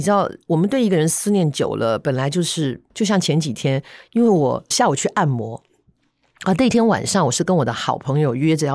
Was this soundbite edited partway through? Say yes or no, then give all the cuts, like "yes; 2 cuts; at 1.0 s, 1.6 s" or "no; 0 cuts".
yes; 1 cut; at 2.9 s